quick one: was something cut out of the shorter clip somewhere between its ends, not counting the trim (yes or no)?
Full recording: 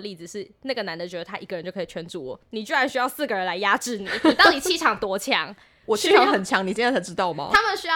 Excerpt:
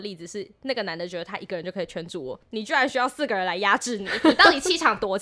no